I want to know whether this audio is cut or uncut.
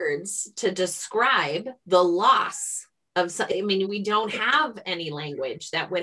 cut